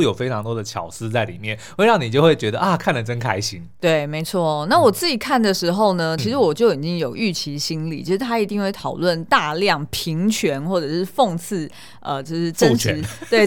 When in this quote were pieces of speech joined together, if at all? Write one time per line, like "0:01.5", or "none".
none